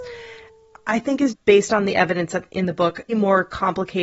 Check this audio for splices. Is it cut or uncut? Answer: cut